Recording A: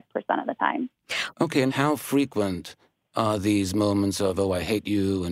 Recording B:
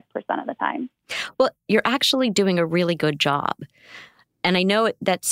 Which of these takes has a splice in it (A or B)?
A